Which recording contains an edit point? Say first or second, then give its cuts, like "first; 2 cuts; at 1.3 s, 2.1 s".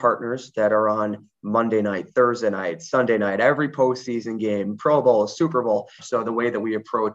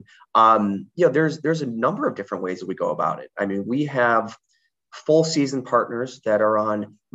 first; 1 cut; at 6.0 s